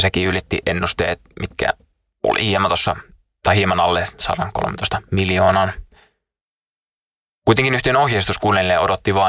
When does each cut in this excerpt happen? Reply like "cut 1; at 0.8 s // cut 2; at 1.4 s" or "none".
none